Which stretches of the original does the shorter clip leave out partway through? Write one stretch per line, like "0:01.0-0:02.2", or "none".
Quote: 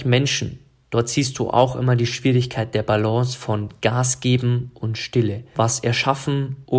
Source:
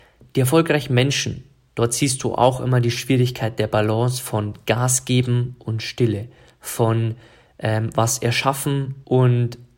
0:06.4-0:07.9